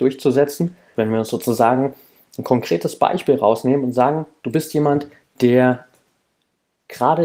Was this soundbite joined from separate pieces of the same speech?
yes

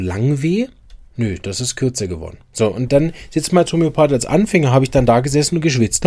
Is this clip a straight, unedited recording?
no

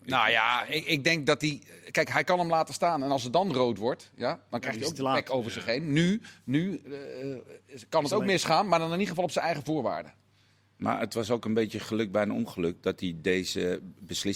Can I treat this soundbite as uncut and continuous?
yes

